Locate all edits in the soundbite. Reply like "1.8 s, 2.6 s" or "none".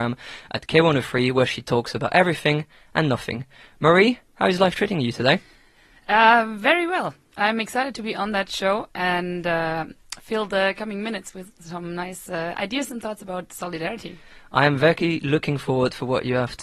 none